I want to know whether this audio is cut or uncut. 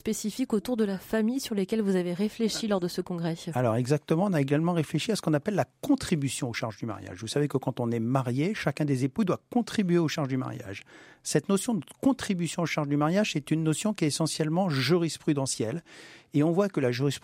uncut